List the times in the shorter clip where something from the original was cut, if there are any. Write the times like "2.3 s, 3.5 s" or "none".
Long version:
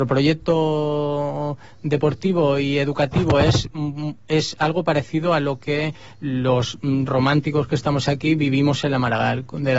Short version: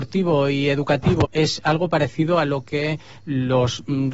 1.2 s

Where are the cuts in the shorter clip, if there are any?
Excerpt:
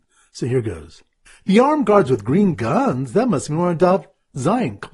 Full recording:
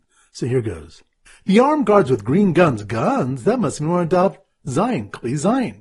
2.5 s

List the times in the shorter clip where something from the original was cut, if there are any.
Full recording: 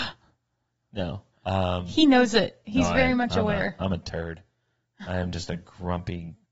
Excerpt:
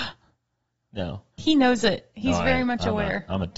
1.4 s

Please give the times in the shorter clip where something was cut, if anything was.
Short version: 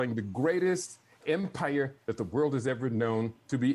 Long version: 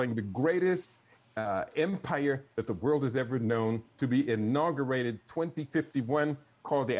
1.2 s

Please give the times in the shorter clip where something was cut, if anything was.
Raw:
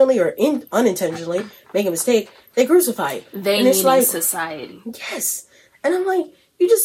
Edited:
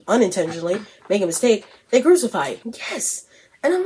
2.6 s

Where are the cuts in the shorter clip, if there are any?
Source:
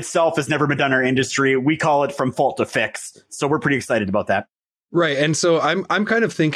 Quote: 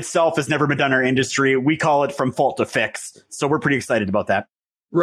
none

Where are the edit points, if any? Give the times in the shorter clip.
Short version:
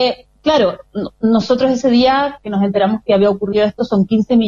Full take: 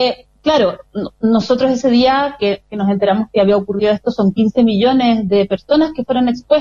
2.4 s

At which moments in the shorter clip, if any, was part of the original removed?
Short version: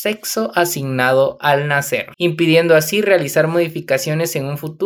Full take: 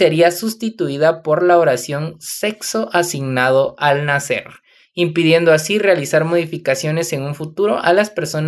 2.1 s

